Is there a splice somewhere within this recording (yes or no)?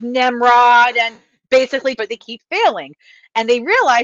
yes